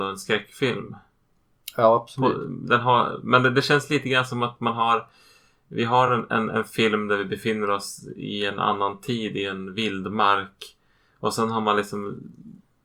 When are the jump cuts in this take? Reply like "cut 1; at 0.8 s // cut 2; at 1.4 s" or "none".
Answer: none